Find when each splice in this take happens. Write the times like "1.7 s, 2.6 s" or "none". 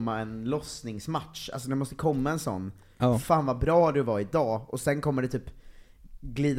none